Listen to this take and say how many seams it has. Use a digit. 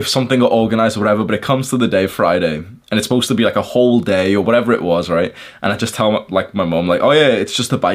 0